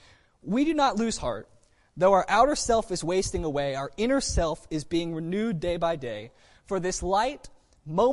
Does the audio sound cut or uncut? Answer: uncut